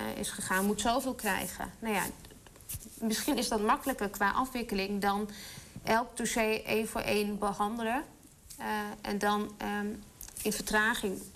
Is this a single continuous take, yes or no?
yes